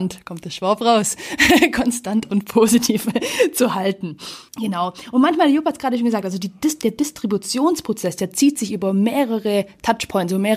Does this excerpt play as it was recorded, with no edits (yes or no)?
no